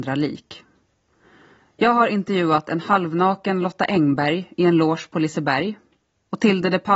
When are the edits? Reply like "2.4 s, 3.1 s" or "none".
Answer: none